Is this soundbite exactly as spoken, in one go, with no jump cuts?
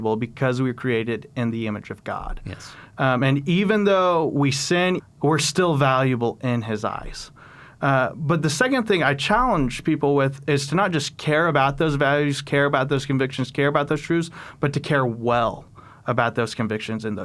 no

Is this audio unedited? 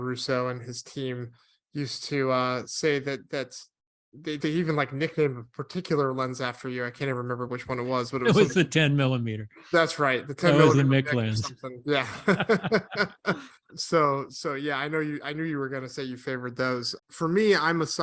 no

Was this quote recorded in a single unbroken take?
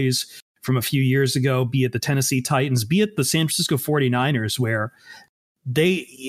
yes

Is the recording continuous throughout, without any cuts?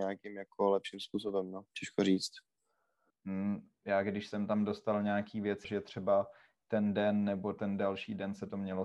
no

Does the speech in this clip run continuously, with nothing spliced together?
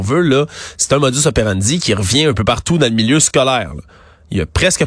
yes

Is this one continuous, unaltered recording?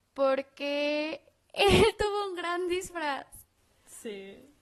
no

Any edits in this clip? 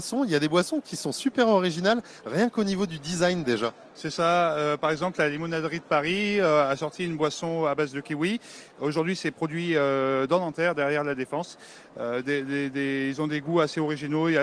no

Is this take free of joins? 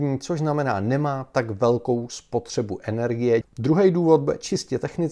no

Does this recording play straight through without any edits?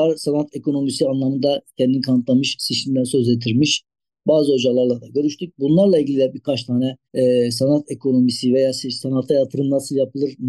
no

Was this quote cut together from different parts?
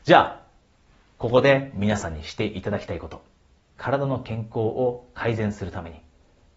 yes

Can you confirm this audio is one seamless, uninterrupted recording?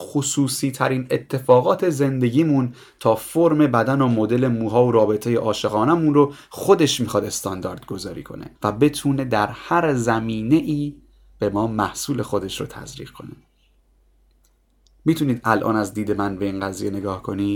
no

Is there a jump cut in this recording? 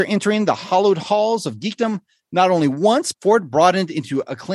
yes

